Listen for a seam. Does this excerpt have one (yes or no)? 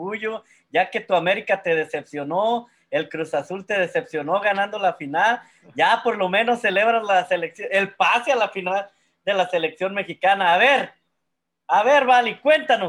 no